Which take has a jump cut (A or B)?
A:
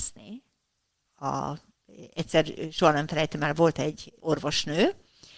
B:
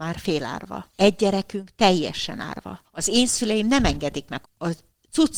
B